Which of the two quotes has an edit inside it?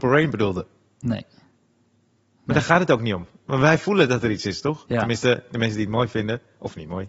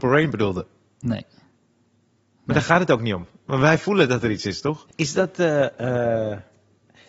second; 1 cut; at 4.9 s

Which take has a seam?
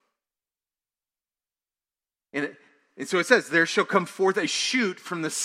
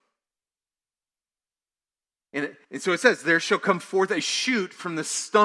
second; 1 cut; at 2.6 s

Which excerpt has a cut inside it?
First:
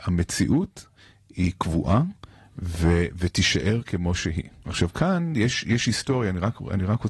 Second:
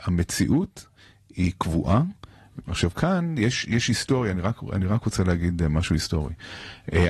second; 1 cut; at 2.6 s

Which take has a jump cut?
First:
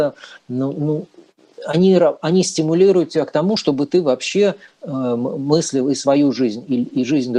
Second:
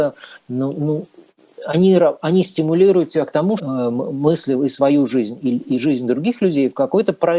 second; 1 cut; at 3.6 s

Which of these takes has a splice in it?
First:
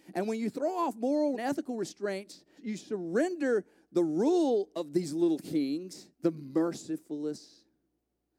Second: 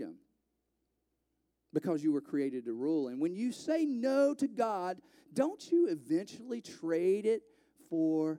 first; 3 cuts; at 1.3 s, 2.6 s, 6.1 s

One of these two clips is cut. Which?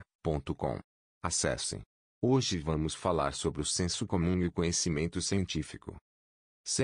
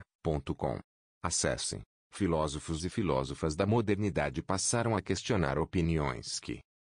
second; 1 cut; at 2.0 s

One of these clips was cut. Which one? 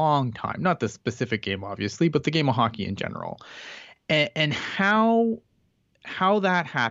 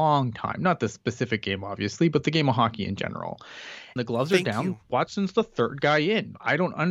second; 1 cut; at 4.0 s

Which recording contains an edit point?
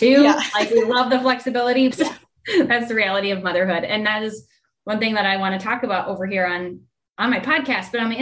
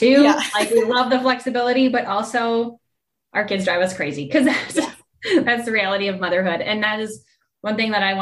first; 1 cut; at 1.9 s

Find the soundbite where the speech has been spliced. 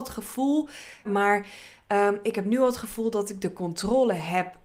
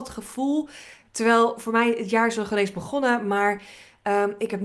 first; 1 cut; at 1.0 s

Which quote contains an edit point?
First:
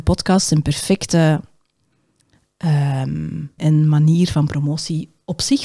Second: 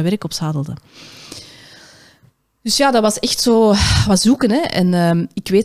first; 1 cut; at 3.6 s

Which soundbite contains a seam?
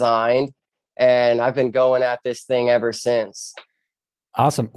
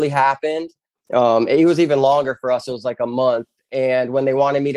second; 1 cut; at 0.9 s

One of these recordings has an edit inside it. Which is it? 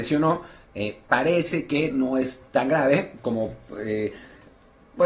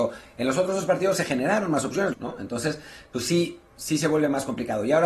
second; 1 cut; at 2.1 s

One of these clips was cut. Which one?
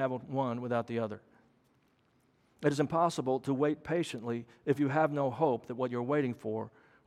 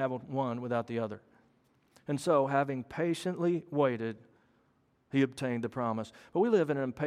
second; 1 cut; at 1.9 s

